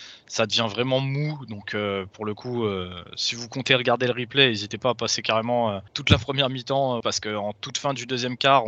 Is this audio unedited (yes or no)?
no